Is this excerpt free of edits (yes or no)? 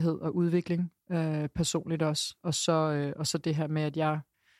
yes